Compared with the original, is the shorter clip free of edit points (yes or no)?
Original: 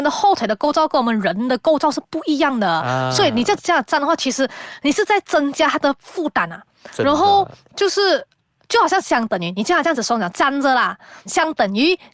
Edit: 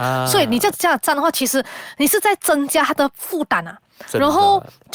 yes